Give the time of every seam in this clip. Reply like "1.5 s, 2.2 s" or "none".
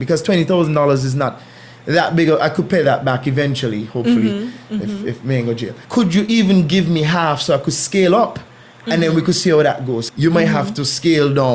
5.8 s, 10.1 s